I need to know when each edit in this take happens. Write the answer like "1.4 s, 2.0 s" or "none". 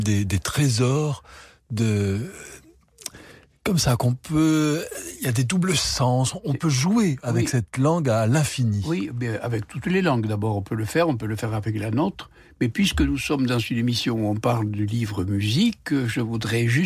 none